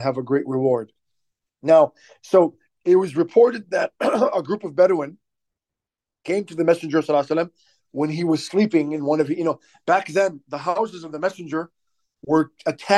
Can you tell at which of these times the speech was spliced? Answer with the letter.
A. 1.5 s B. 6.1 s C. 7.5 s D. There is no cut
A